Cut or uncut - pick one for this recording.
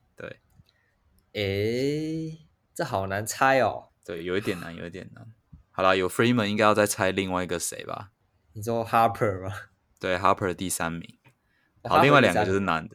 uncut